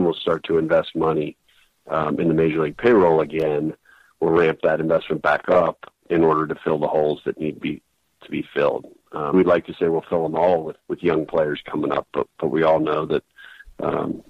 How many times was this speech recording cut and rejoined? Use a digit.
3